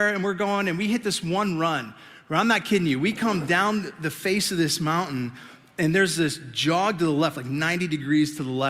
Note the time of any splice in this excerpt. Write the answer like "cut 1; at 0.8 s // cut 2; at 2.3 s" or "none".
none